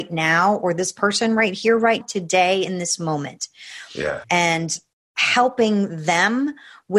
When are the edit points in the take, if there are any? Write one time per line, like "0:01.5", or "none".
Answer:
0:02.0
0:04.2